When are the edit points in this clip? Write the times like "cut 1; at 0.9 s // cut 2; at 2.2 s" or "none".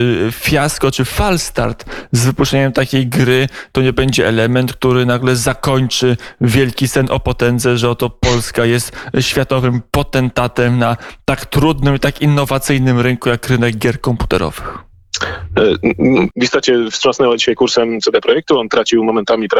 cut 1; at 16.3 s